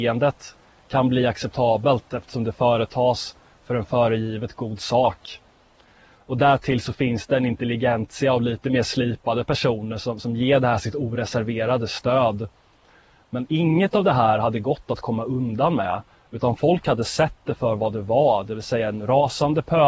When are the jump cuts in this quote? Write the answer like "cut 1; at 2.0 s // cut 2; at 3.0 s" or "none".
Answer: cut 1; at 6.1 s